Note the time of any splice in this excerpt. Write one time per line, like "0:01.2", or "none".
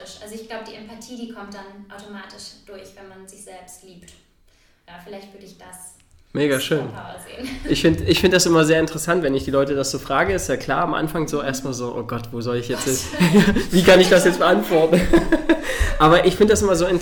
none